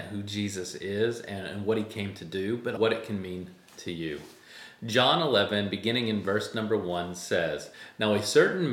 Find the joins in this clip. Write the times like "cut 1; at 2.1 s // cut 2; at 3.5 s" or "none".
cut 1; at 2.8 s